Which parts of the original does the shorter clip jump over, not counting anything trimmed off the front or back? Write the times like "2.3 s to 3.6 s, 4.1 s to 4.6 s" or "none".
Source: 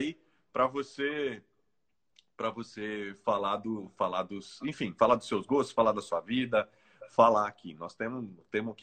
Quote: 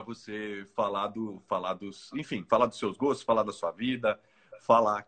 none